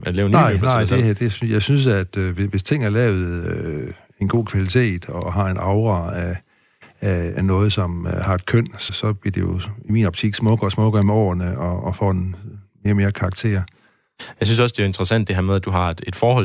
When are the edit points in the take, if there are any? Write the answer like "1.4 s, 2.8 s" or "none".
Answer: 8.9 s

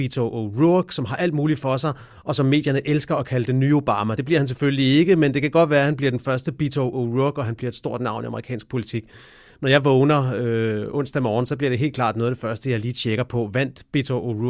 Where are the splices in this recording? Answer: none

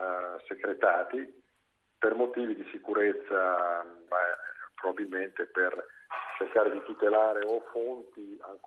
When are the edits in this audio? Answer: 4.1 s

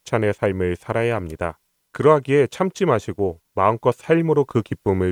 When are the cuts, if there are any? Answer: 1.8 s

